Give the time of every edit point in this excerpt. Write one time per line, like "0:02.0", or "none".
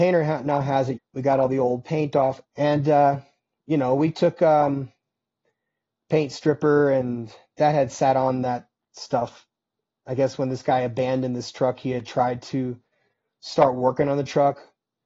0:01.0
0:02.4